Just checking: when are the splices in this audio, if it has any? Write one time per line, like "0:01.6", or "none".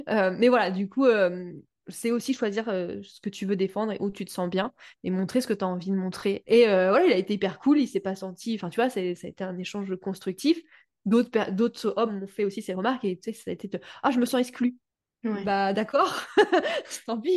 0:06.4

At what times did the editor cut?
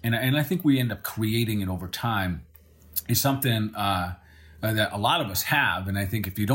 none

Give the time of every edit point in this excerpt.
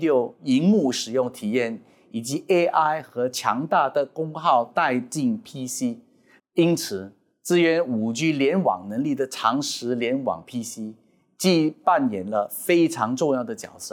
0:06.4

